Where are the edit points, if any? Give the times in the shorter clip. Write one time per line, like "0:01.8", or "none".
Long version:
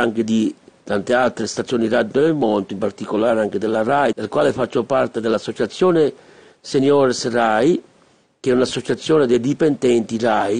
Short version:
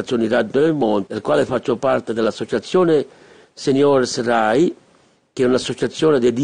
0:01.1